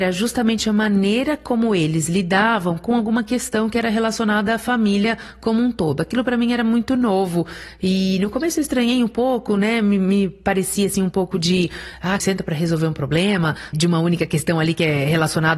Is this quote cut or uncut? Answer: cut